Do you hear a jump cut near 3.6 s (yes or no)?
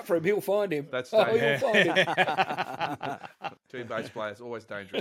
yes